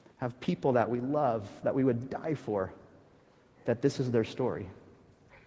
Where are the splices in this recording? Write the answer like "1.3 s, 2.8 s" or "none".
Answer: none